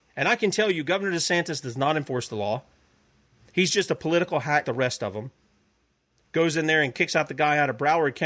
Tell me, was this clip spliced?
yes; 1 cut; at 4.6 s

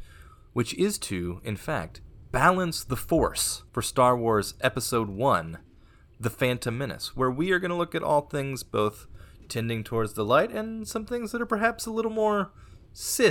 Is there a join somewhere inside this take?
yes; 1 cut; at 3.7 s

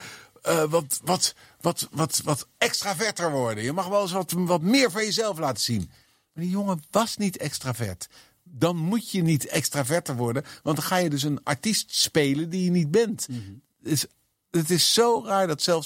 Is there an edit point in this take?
no; 0 cuts

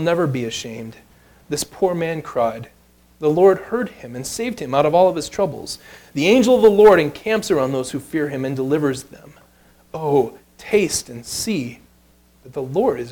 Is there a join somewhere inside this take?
no; 0 cuts

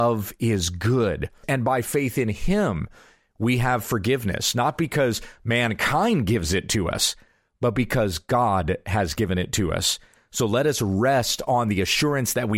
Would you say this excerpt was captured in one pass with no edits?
no; 1 cut; at 1.4 s

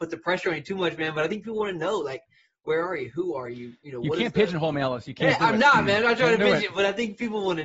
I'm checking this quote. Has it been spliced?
no; 0 cuts

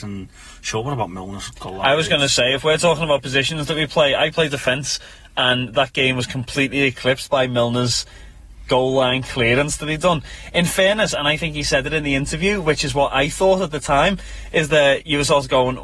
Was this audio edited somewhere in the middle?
no; 0 cuts

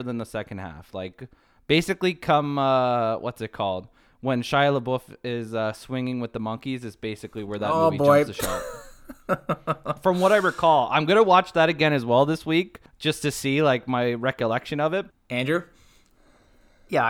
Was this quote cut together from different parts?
yes; 2 cuts; at 12.9 s, 15.1 s

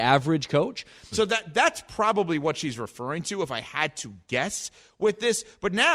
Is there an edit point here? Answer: yes; 1 cut; at 1.1 s

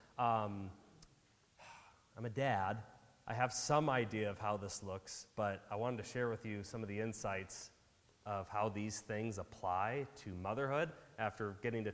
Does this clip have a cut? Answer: no; 0 cuts

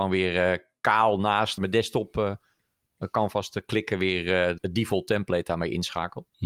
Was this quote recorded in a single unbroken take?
no; 2 cuts; at 1.6 s, 4.6 s

